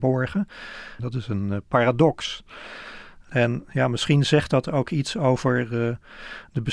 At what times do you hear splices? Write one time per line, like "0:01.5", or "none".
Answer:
0:01.0